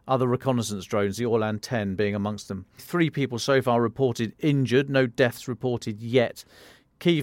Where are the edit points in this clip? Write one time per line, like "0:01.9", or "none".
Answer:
0:02.8